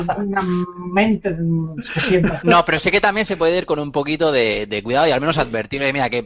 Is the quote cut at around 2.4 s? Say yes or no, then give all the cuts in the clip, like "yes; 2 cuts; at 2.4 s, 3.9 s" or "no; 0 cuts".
yes; 1 cut; at 2.4 s